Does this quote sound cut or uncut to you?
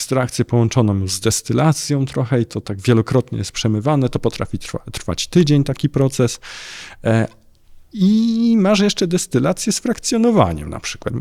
uncut